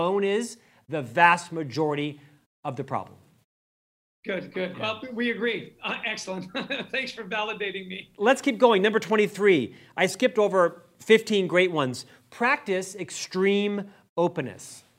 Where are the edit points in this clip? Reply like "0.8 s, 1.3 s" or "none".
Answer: none